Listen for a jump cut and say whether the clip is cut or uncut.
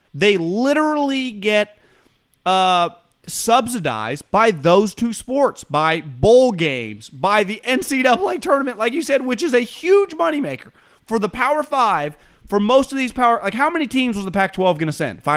uncut